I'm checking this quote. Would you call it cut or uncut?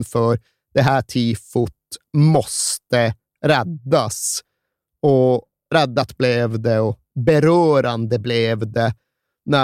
uncut